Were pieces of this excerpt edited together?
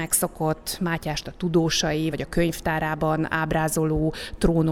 yes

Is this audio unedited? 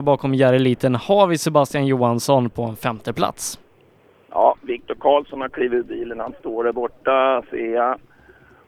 yes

